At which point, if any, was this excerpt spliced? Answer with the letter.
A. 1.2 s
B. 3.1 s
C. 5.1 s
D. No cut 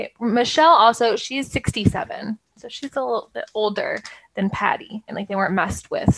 C